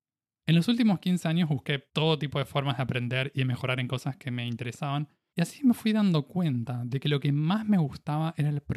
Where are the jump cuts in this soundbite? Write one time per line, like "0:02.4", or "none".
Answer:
none